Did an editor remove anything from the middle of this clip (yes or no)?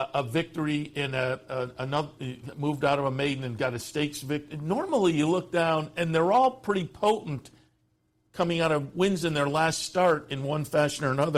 no